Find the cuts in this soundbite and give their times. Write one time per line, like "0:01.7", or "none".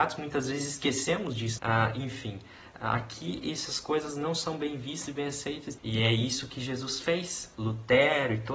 0:01.6
0:05.8
0:07.5